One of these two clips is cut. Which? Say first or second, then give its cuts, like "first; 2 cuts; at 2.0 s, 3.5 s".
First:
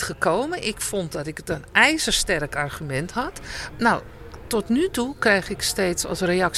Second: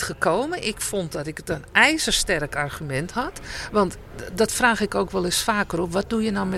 first; 1 cut; at 3.7 s